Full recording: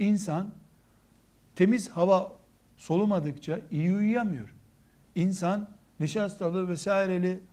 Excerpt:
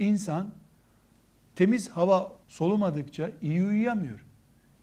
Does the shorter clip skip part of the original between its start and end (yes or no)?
yes